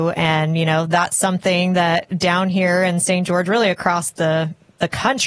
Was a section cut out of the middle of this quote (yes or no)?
no